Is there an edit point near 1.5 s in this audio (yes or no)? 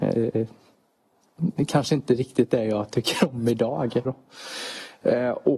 no